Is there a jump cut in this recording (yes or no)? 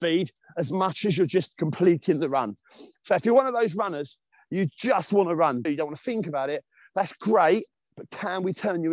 yes